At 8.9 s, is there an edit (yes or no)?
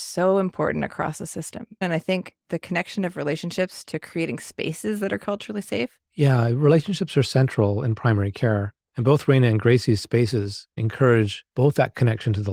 yes